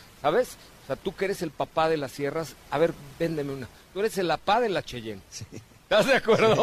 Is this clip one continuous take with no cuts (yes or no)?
yes